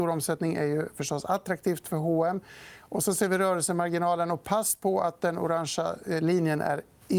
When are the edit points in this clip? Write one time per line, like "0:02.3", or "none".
none